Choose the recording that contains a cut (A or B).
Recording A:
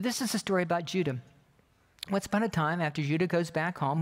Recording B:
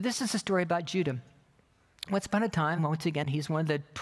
B